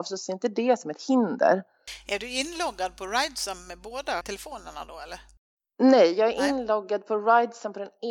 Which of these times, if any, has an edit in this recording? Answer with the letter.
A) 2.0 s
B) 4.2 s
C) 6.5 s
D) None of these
B